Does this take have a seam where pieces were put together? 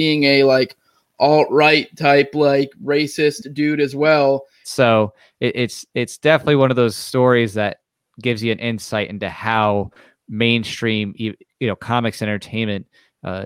yes; 1 cut; at 4.6 s

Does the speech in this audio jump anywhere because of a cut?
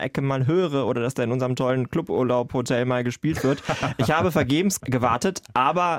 no; 0 cuts

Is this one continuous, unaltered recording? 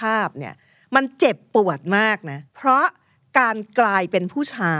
no; 1 cut; at 2.5 s

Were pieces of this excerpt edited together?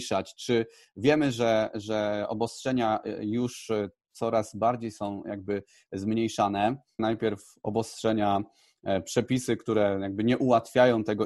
yes; 1 cut; at 7.0 s

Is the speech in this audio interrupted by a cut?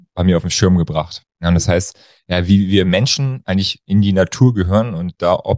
no; 0 cuts

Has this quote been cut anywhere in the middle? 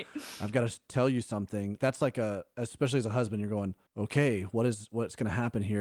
yes; 2 cuts; at 1.8 s, 3.9 s

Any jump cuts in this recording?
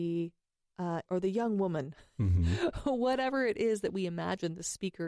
yes; 1 cut; at 1.1 s

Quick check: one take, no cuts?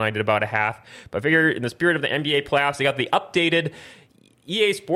yes; 0 cuts

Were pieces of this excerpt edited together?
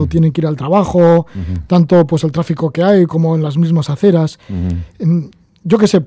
no; 0 cuts

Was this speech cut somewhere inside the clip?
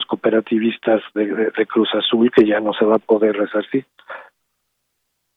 no; 0 cuts

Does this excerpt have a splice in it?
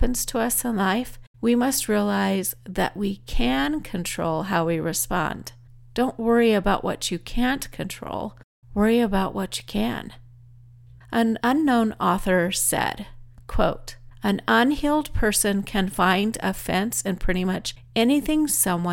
no; 0 cuts

